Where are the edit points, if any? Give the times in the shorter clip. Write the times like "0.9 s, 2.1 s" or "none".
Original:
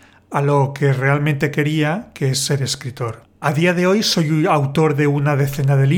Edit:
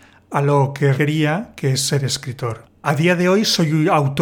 1.0 s